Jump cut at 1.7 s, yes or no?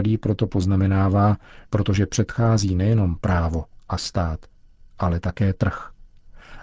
yes